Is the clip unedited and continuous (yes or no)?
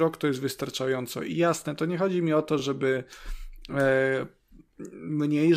yes